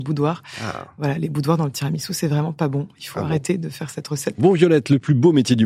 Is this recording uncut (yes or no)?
no